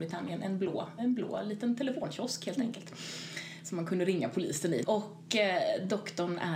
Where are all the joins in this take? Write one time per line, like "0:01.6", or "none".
0:01.0
0:04.8